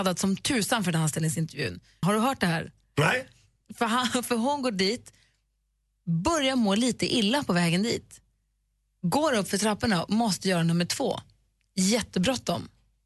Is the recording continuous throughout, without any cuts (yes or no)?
no